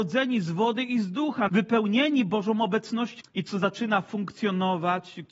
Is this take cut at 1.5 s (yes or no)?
yes